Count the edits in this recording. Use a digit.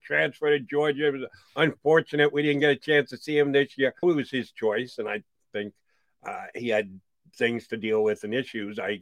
1